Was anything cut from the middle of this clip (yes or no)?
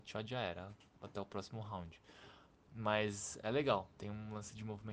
yes